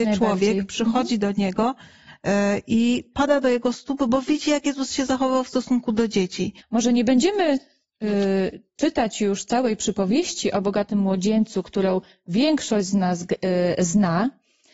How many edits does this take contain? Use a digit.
1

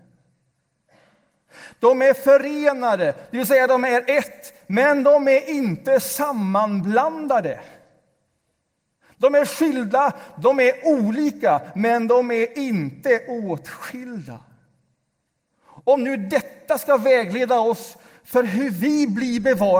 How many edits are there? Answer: 0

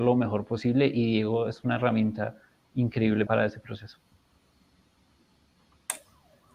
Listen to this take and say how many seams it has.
1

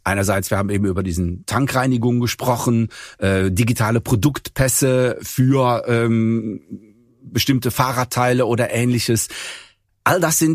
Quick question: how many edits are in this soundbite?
0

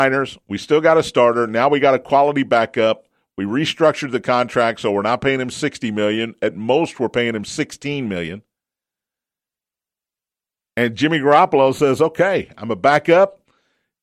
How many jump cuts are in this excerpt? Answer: 0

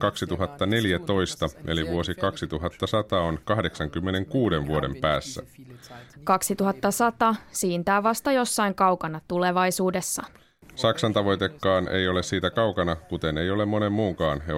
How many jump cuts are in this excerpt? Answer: 2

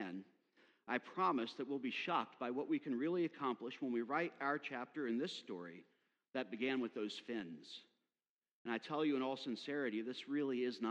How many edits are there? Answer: 0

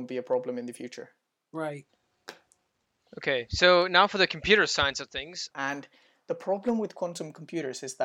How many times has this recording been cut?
1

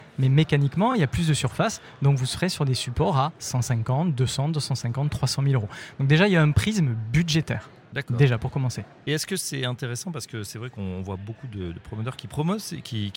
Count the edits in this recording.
0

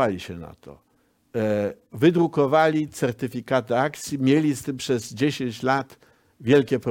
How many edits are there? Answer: 0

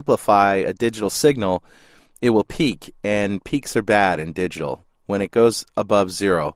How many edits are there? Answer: 0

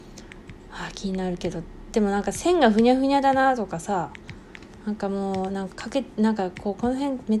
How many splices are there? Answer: 1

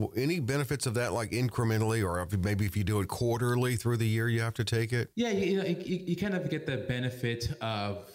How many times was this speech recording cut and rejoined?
1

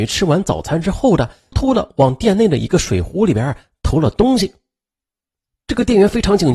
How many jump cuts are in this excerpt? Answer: 1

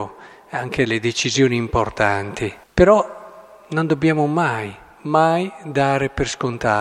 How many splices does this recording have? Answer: 1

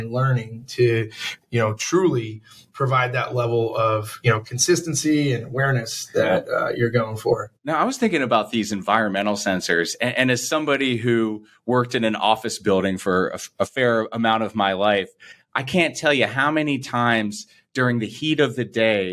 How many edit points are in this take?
0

